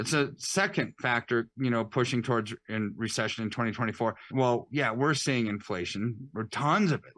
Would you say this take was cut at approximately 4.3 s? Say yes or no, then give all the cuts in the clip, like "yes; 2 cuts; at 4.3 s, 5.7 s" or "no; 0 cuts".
yes; 1 cut; at 4.3 s